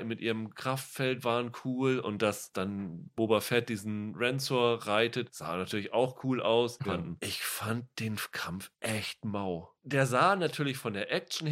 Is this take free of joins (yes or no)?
no